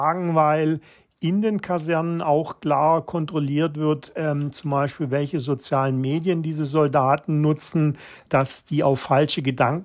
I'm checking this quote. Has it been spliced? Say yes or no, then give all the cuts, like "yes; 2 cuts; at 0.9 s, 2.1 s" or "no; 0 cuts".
yes; 1 cut; at 8.2 s